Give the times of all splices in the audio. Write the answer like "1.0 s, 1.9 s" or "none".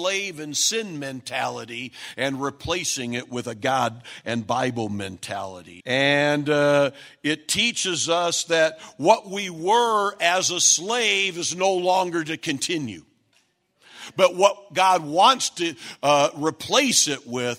5.8 s